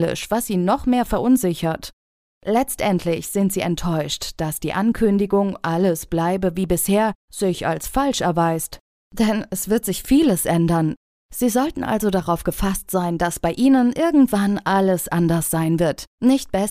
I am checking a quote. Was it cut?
no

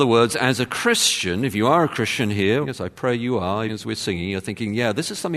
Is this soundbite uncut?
no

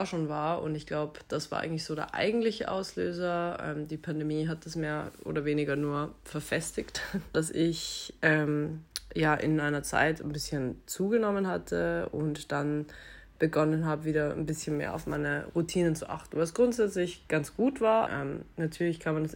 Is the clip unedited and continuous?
no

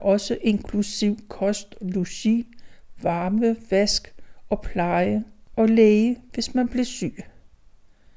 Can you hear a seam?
no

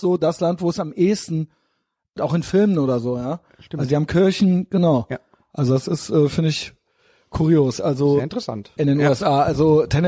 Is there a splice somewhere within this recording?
yes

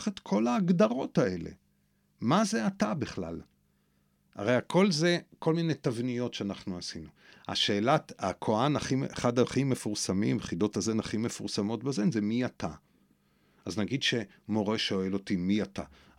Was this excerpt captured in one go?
yes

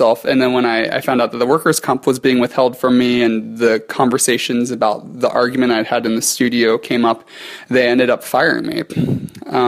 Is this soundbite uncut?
yes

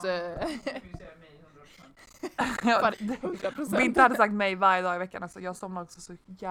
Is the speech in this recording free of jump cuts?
no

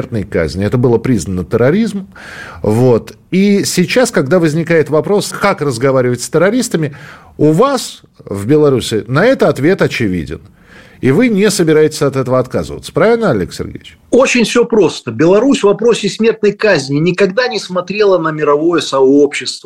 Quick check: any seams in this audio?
yes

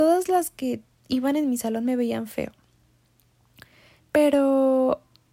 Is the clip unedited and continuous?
no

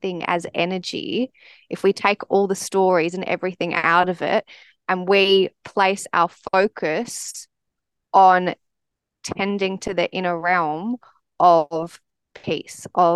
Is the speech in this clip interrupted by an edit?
no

